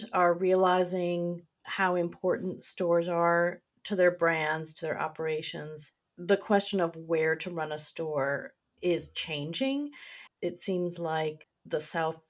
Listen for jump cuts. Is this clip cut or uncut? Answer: cut